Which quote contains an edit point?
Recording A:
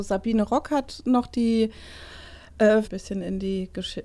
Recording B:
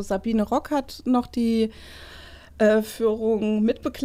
A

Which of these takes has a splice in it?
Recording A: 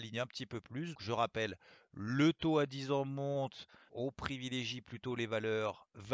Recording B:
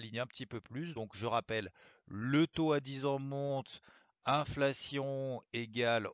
A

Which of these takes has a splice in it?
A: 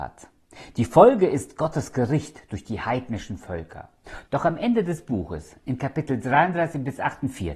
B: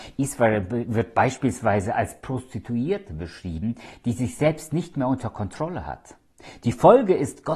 A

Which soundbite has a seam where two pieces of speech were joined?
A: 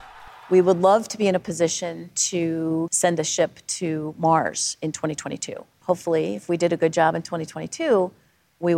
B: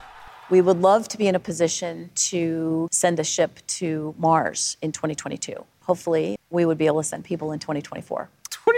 B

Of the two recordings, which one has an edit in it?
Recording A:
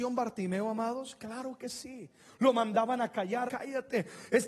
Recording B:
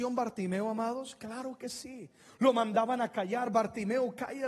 A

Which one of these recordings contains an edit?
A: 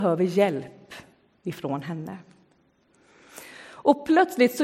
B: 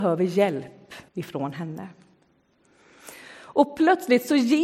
B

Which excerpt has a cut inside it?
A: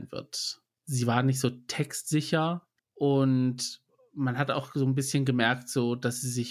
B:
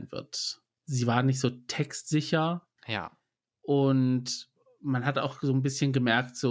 A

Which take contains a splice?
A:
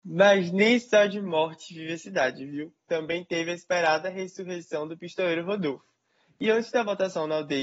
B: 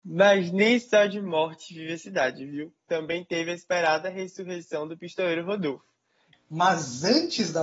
B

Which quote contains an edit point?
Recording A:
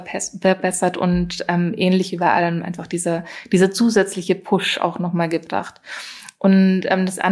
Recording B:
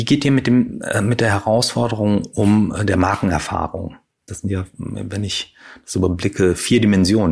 B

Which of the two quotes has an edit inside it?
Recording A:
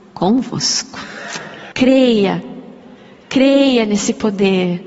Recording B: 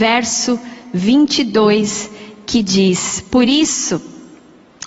A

